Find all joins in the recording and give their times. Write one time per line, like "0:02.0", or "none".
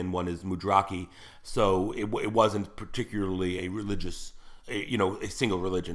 0:03.6
0:04.6